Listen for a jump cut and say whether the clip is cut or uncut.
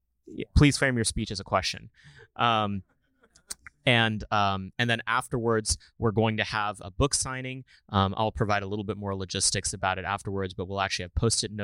cut